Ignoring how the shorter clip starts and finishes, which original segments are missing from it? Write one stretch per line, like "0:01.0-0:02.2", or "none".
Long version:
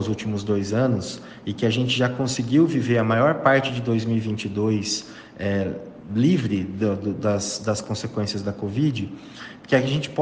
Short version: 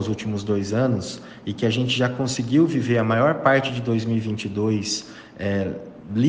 none